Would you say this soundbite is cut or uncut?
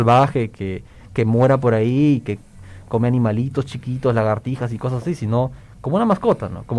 uncut